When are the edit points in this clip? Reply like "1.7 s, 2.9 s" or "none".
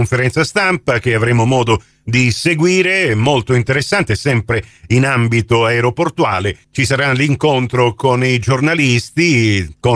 none